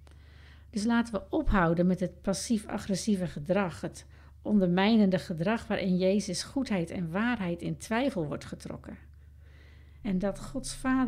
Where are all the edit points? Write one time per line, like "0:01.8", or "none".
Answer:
0:10.0